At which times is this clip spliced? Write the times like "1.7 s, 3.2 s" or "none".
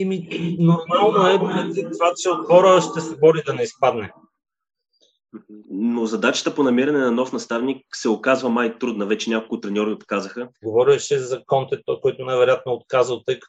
5.6 s, 10.6 s